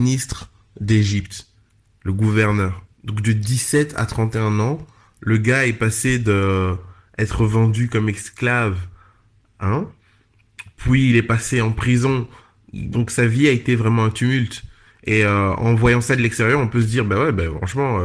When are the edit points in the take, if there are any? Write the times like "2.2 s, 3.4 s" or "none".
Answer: 2.9 s